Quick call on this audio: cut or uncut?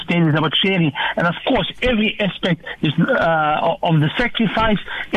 uncut